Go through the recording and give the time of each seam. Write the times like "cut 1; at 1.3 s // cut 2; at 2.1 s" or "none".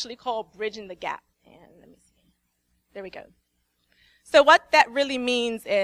cut 1; at 1.3 s